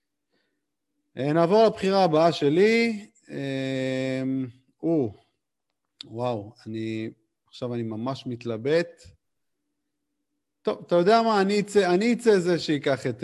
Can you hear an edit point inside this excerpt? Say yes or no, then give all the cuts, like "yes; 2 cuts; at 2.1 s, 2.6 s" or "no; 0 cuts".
no; 0 cuts